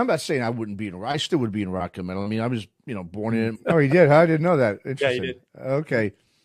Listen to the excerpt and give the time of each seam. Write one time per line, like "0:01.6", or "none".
0:03.5